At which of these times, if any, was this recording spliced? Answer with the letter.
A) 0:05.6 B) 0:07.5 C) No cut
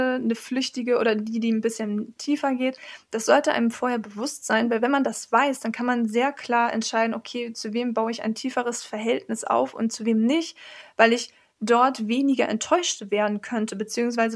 C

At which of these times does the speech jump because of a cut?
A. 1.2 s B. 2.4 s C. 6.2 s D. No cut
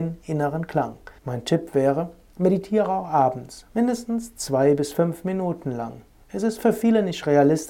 A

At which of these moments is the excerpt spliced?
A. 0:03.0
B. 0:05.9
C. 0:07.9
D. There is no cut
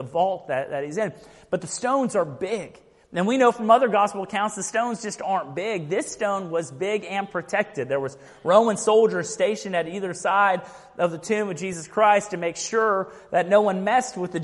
D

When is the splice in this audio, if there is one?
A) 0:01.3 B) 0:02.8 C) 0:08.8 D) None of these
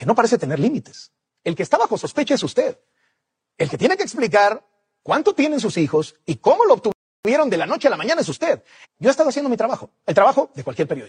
C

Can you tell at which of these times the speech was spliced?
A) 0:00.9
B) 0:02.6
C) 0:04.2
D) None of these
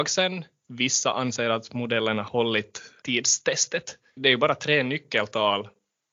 C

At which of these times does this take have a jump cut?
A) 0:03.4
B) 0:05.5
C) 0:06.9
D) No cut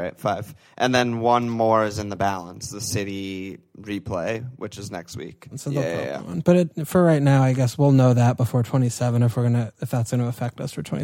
B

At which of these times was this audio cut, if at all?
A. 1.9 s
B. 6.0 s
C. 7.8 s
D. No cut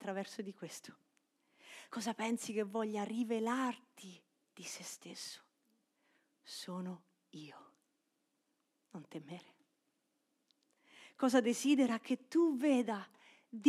D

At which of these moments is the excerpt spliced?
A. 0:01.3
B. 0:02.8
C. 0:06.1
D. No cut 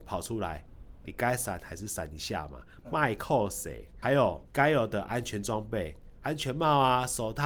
D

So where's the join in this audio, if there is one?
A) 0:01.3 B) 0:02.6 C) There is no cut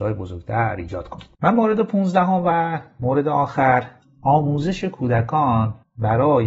A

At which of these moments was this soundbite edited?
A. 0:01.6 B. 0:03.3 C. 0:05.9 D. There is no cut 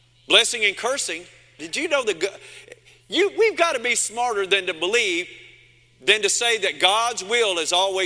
A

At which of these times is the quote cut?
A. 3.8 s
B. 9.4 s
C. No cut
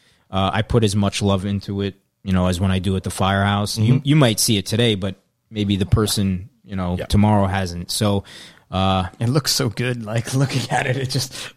A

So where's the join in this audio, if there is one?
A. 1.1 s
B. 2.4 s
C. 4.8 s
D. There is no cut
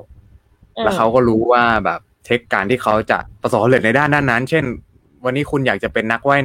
B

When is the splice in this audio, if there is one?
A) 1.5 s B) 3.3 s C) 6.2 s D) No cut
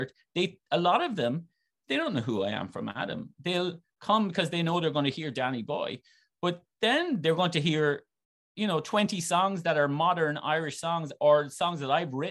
D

